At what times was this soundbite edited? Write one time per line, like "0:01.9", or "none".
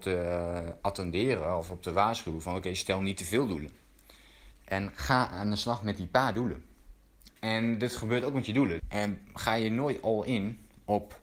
0:04.5
0:07.3
0:08.8

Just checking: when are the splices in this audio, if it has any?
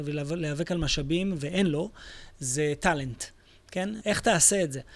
0:04.0

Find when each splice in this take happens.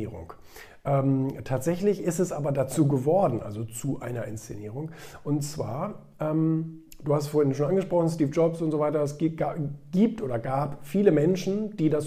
none

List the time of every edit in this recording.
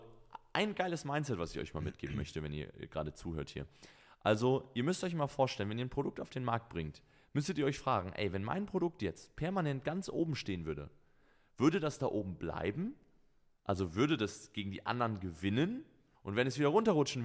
0:16.1

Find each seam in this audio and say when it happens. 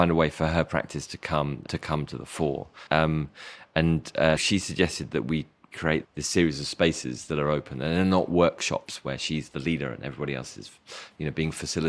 0:04.4
0:06.0

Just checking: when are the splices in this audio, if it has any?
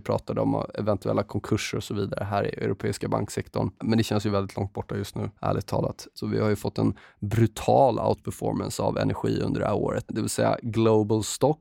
0:06.1
0:10.1

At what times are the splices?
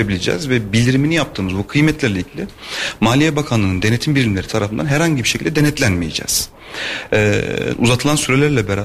0:07.7

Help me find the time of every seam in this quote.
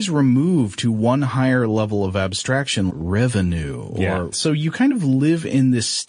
0:02.9
0:04.3

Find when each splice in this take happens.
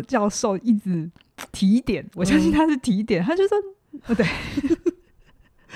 0:01.5
0:04.0

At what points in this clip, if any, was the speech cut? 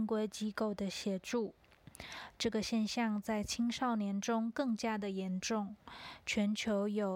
0:02.3

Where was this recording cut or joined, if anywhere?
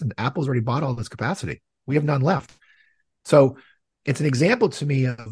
none

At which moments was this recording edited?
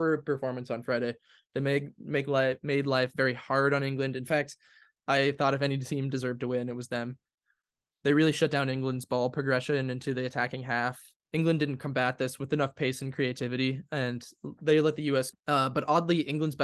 0:11.2
0:15.3

